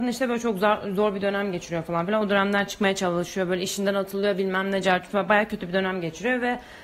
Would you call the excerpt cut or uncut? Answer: uncut